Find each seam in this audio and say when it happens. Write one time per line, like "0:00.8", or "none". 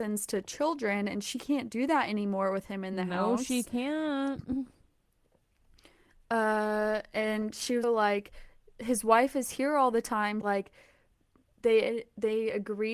0:07.8
0:10.4